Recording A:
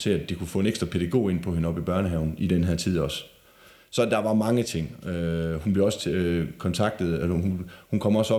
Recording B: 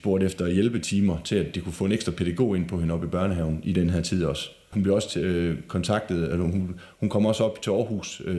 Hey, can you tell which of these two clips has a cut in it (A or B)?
B